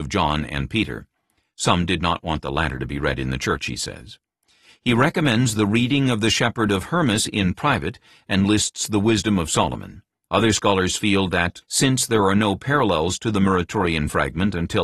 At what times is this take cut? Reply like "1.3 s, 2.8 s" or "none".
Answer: 10.3 s, 11.6 s